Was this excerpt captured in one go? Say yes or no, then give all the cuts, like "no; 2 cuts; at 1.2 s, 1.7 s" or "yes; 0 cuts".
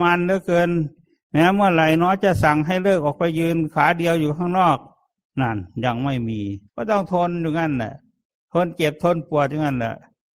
no; 1 cut; at 6.7 s